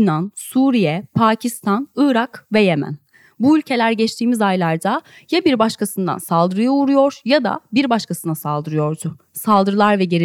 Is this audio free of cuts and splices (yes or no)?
yes